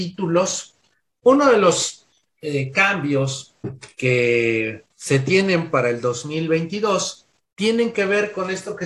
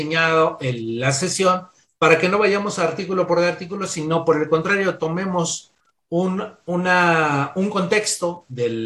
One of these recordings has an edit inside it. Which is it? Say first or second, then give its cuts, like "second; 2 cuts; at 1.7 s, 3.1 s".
first; 2 cuts; at 1.2 s, 4.9 s